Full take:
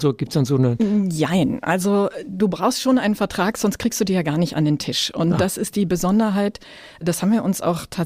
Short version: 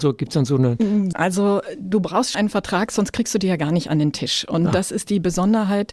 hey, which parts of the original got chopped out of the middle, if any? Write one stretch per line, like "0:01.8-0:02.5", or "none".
0:01.1-0:01.6
0:02.8-0:03.0